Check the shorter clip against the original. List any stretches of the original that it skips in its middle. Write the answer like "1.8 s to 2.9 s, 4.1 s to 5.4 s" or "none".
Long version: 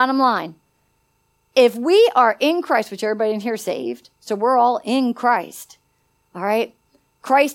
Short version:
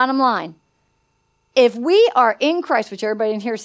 none